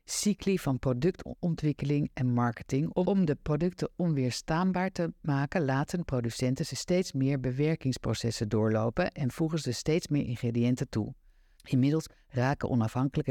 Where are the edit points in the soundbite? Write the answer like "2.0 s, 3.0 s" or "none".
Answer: 11.6 s

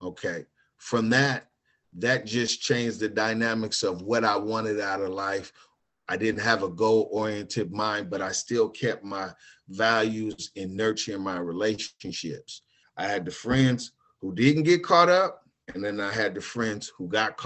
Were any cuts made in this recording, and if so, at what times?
12.8 s

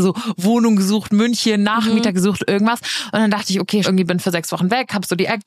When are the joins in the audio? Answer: 3.8 s

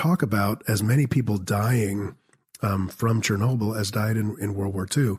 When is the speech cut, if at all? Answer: none

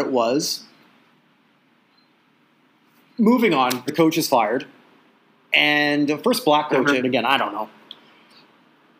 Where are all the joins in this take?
3.9 s, 7.0 s

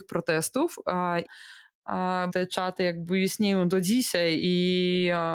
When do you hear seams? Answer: 1.3 s, 2.3 s

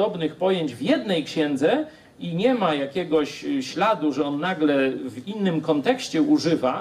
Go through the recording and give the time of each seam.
none

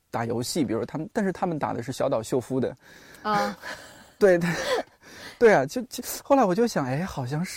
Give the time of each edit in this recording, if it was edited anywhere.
none

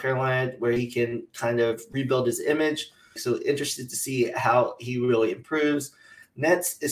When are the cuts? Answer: 3.2 s

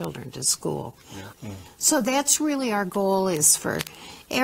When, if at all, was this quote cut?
1.3 s

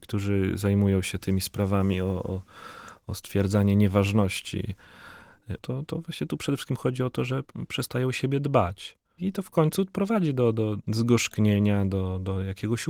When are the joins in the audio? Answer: 5.6 s, 9.2 s, 10.8 s

